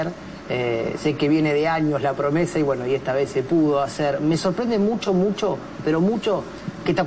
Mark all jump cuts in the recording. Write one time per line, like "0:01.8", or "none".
none